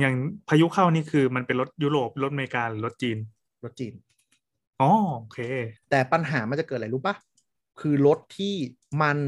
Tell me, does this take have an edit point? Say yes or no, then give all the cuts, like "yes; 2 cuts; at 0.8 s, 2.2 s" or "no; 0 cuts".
no; 0 cuts